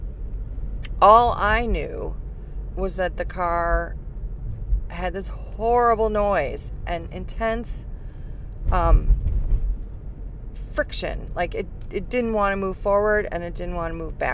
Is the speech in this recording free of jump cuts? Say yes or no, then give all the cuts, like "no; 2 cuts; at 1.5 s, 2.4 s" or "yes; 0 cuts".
yes; 0 cuts